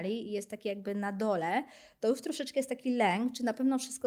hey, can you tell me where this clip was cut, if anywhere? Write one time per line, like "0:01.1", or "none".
none